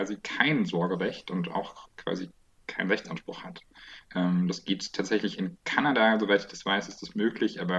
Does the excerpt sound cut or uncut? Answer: cut